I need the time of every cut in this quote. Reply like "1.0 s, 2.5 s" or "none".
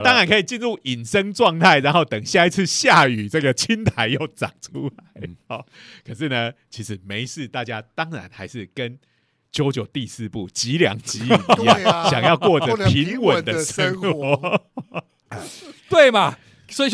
15.3 s